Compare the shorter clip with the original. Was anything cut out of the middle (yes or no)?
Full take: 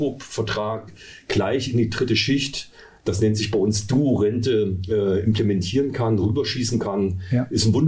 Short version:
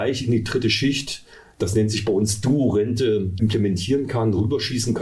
yes